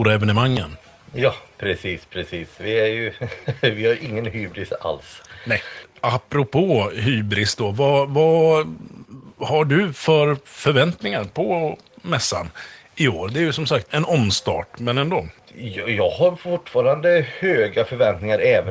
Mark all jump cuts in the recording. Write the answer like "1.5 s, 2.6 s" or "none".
13.9 s